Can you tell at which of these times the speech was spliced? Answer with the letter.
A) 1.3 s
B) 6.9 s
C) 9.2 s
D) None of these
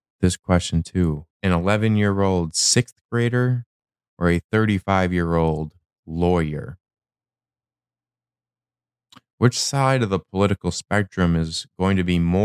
A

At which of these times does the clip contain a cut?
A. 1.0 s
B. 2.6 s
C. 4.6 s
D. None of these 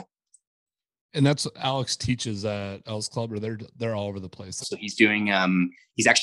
C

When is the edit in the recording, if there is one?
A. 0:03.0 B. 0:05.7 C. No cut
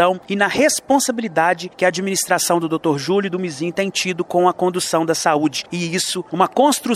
B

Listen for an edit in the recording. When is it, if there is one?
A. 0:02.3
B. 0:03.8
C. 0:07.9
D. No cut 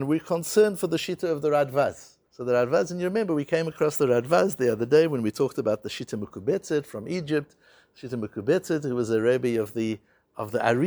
A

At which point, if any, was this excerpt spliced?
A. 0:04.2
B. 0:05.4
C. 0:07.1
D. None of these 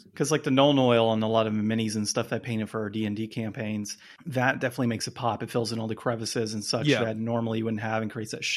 A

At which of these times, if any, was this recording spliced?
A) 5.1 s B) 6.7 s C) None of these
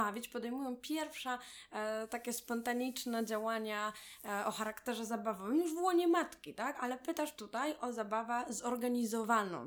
B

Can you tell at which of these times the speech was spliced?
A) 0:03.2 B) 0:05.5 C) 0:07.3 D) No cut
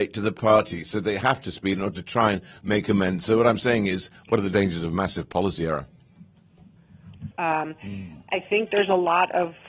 C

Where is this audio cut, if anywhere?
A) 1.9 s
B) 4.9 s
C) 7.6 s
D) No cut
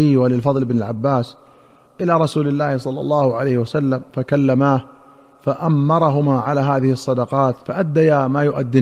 C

